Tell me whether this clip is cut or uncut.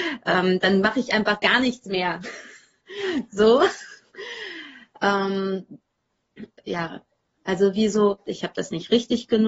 cut